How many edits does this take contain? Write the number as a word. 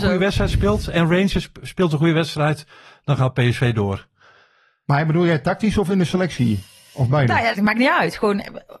one